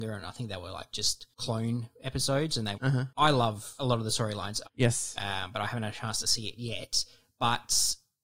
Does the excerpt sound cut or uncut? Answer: cut